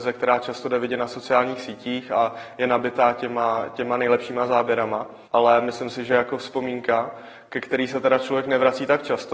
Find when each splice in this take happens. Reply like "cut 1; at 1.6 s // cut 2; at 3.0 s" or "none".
cut 1; at 5.2 s